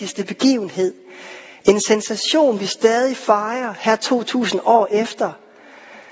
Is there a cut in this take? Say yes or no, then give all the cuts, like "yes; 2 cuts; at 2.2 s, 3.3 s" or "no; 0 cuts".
no; 0 cuts